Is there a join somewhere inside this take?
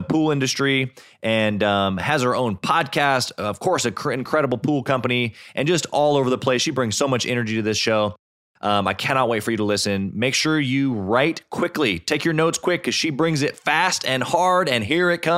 no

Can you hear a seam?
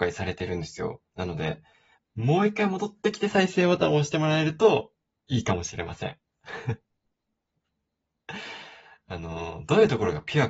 yes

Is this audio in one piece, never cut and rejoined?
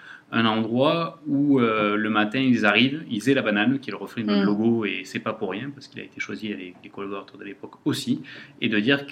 yes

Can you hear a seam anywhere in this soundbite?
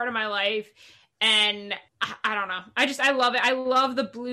yes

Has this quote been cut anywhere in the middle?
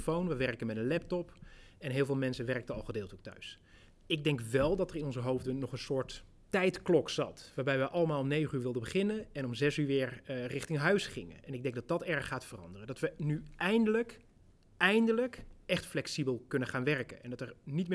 no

